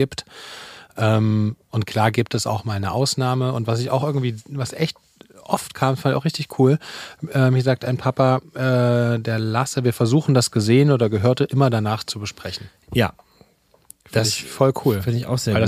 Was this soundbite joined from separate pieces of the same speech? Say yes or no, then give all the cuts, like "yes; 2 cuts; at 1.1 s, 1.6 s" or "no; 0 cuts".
no; 0 cuts